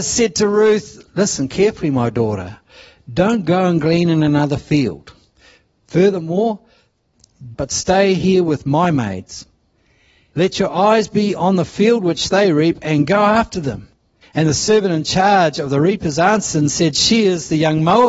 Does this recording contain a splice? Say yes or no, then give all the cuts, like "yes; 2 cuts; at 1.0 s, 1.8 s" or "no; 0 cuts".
yes; 3 cuts; at 1.1 s, 7.5 s, 14.2 s